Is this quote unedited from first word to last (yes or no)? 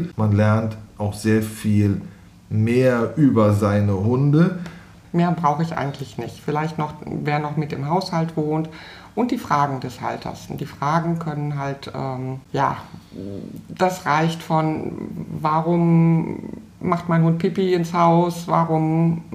no